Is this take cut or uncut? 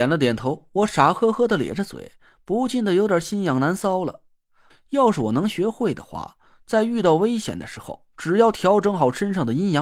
cut